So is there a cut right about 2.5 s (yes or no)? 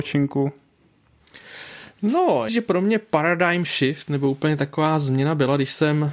yes